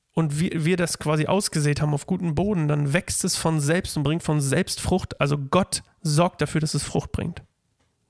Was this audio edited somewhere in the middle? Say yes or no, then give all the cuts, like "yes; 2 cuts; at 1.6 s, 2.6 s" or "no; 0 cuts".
no; 0 cuts